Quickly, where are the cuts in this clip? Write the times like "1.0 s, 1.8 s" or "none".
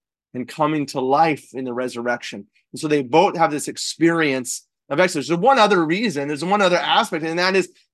none